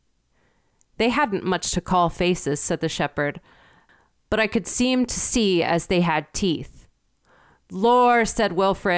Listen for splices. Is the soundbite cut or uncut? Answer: uncut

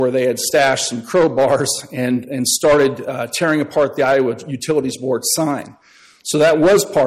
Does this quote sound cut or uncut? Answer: uncut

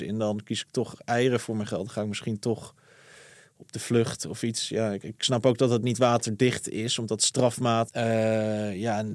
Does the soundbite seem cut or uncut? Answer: cut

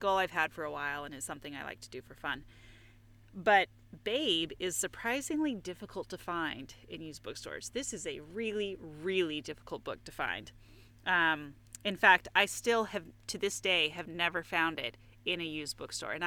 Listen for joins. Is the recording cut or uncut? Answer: uncut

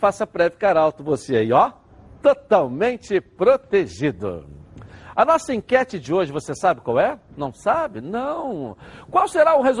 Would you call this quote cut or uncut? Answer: uncut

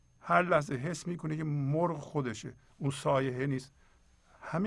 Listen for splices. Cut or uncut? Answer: uncut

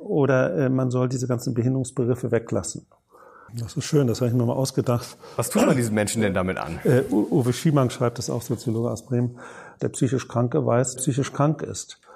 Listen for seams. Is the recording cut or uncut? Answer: cut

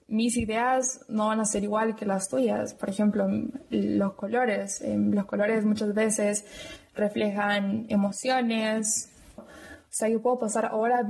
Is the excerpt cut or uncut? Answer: cut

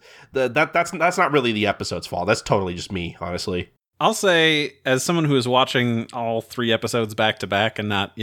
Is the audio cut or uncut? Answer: uncut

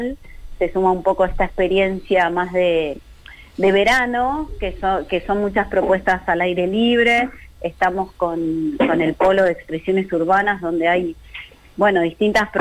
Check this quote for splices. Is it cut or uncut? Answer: uncut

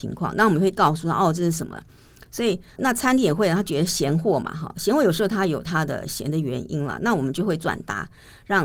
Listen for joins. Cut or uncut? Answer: cut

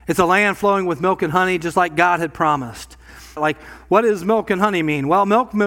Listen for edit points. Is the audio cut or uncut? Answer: cut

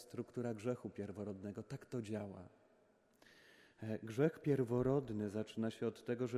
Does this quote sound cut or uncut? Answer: uncut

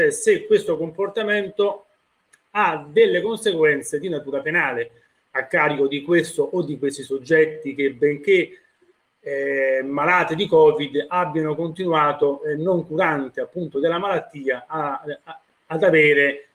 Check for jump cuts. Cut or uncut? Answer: uncut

